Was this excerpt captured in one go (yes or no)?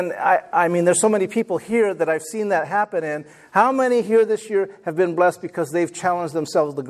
yes